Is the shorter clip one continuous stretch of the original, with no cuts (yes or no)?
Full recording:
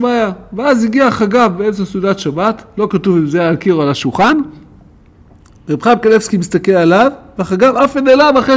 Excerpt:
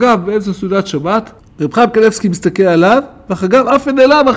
no